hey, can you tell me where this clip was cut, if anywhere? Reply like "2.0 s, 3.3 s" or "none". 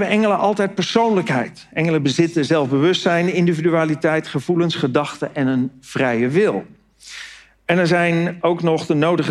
none

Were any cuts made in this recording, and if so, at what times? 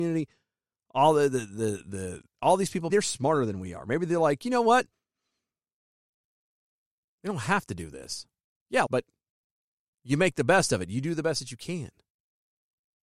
2.9 s, 8.9 s

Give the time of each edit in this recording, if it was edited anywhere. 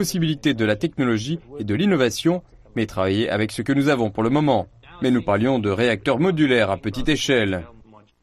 4.8 s

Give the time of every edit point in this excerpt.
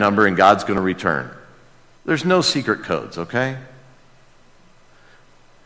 none

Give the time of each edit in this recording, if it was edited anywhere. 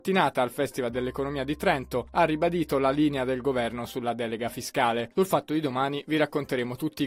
5.1 s

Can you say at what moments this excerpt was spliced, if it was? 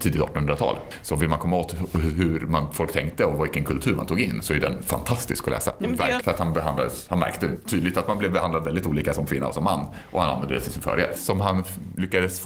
6.2 s, 11.2 s

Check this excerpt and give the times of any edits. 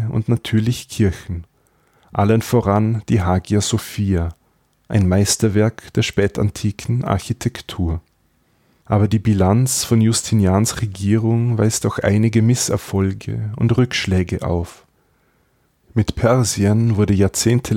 8.8 s

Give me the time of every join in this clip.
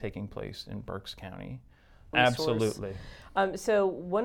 2.1 s

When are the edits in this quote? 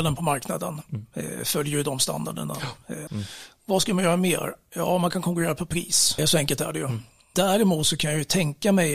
3.1 s, 6.2 s

